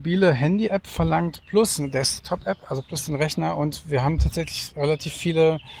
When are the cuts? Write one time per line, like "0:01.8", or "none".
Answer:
none

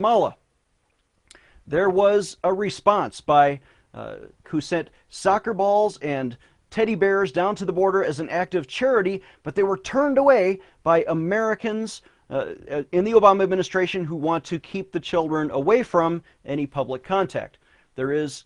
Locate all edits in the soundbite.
0:04.4

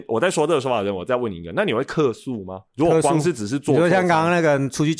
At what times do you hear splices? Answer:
0:02.7

